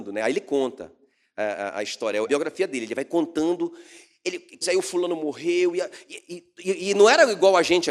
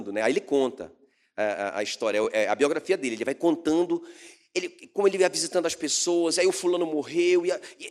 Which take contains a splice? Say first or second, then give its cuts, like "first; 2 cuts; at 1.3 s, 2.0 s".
first; 2 cuts; at 2.2 s, 4.6 s